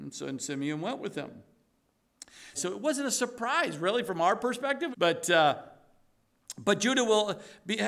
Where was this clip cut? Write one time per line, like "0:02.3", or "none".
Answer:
0:02.5
0:04.9

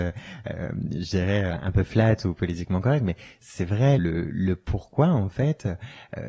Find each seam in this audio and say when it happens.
0:01.5
0:04.0

